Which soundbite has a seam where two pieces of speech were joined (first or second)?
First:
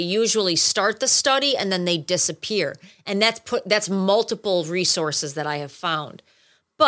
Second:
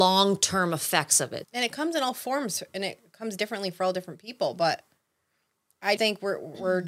second